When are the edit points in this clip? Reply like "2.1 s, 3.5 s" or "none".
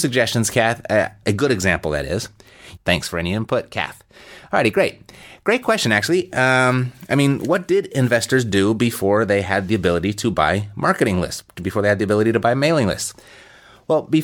1.2 s, 2.8 s